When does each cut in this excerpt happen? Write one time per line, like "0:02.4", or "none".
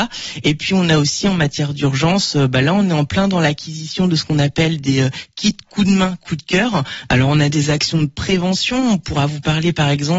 0:07.1